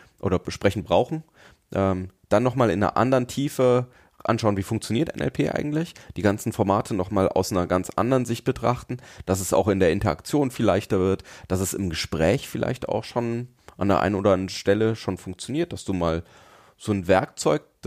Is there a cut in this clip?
no; 0 cuts

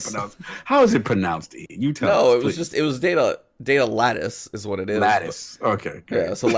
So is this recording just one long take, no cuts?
yes; 0 cuts

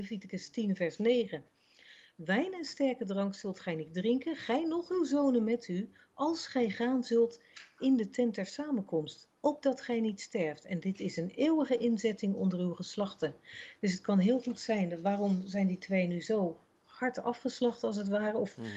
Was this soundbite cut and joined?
no; 0 cuts

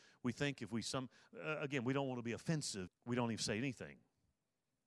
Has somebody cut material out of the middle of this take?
yes; 1 cut; at 2.9 s

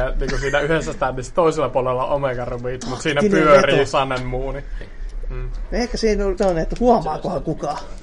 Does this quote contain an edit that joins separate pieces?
yes; 2 cuts; at 4.8 s, 6.4 s

